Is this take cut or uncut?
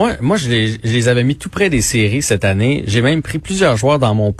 uncut